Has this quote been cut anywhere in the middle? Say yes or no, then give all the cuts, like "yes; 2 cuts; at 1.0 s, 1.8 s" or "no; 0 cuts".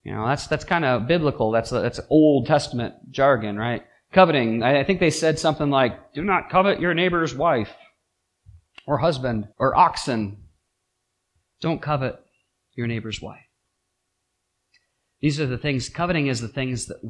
yes; 1 cut; at 9.5 s